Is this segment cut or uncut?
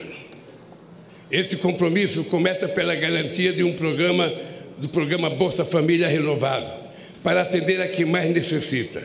cut